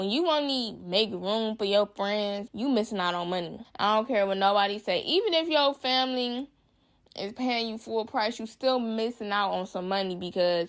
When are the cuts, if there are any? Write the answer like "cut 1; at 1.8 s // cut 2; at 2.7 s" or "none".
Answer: cut 1; at 2.5 s